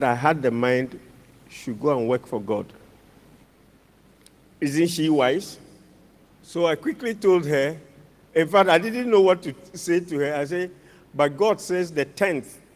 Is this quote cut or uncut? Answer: uncut